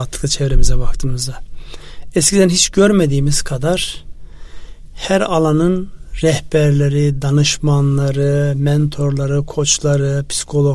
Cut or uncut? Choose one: uncut